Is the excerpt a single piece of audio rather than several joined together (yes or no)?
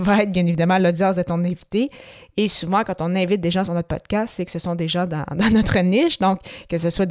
yes